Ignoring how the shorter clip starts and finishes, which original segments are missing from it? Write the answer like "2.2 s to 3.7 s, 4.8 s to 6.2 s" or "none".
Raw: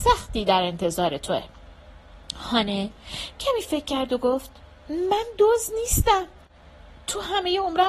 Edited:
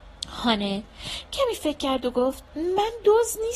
4.6 s to 4.8 s